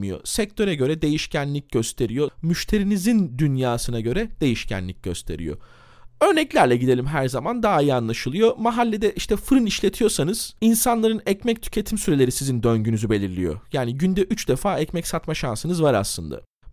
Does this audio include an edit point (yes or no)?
yes